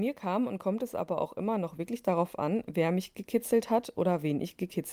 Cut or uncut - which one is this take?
uncut